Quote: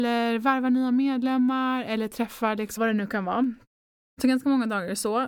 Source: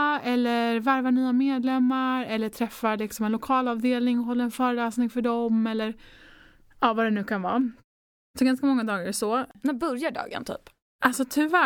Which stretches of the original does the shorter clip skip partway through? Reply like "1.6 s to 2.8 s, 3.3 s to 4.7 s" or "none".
3.2 s to 6.9 s